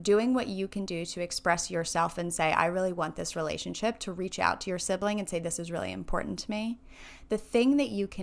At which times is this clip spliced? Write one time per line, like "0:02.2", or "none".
none